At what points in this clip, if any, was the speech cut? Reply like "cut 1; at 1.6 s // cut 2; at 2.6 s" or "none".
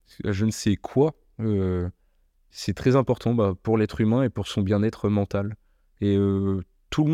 none

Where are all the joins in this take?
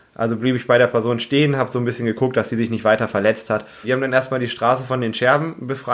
cut 1; at 3.8 s

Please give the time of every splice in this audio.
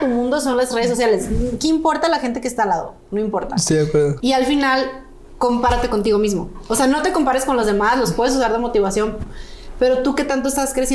cut 1; at 4.2 s

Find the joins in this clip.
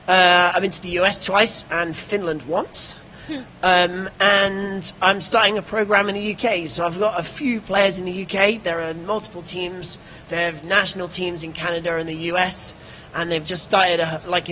cut 1; at 8.6 s

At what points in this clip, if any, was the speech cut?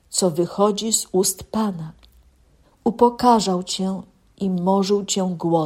cut 1; at 2.6 s

